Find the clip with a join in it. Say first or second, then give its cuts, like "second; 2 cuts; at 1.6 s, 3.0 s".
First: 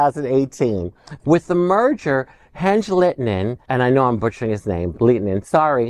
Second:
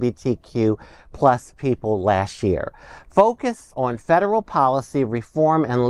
first; 3 cuts; at 1.2 s, 3.6 s, 4.9 s